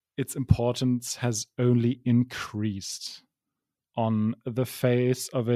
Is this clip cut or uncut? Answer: cut